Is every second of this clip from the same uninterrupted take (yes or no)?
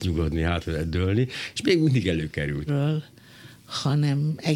no